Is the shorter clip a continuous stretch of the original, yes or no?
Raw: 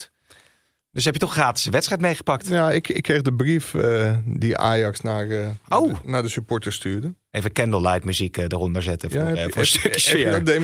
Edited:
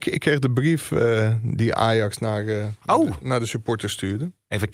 yes